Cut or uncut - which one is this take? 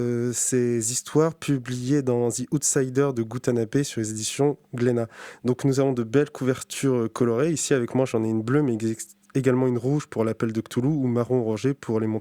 cut